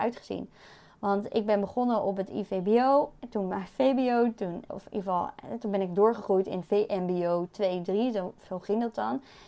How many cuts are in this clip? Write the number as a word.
one